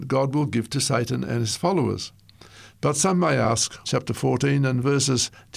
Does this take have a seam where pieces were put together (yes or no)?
yes